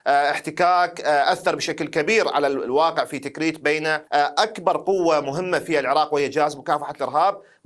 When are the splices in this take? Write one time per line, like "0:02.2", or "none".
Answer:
0:04.1